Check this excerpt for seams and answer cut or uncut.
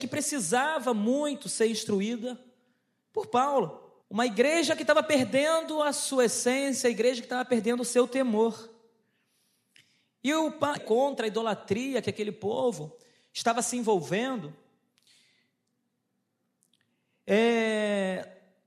cut